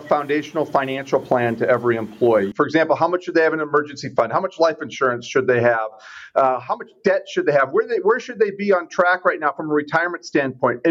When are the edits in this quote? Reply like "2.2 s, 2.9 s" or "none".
2.5 s